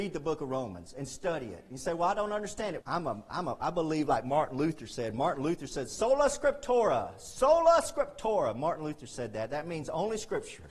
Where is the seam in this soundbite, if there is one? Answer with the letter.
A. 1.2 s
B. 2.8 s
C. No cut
B